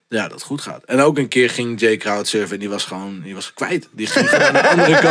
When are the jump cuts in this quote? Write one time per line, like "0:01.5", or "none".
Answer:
none

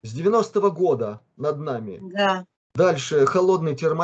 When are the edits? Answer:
0:02.6

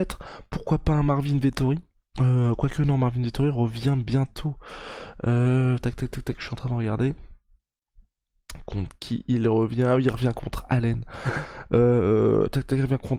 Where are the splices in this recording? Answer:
none

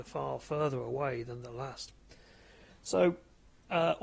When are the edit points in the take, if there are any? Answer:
0:02.7

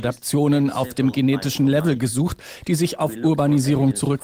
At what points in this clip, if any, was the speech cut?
none

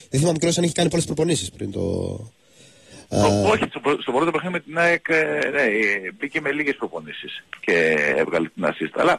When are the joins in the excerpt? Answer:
none

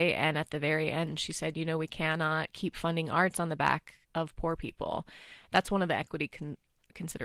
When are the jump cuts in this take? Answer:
0:04.0

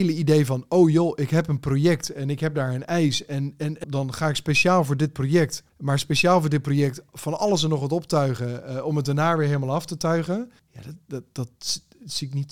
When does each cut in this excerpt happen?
0:03.8
0:05.7

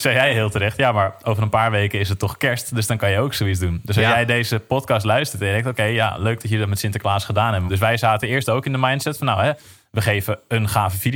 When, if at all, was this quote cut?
0:07.7

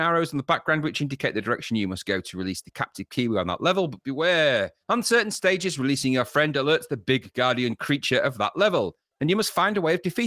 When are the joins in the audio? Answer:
none

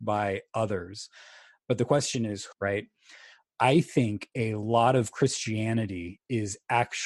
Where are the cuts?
0:02.5

